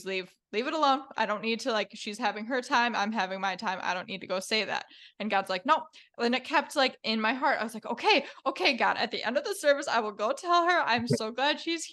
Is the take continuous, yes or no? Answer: yes